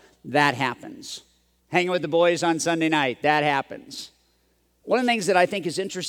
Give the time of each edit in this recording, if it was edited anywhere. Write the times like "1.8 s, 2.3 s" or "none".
1.6 s, 4.8 s